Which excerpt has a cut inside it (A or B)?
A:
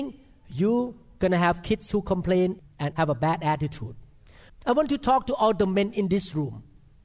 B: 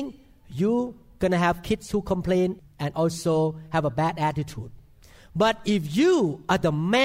A